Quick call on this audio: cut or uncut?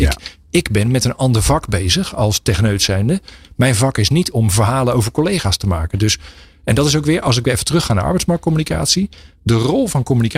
uncut